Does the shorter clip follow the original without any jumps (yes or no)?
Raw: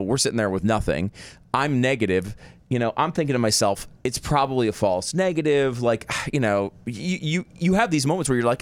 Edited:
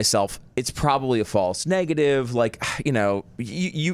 yes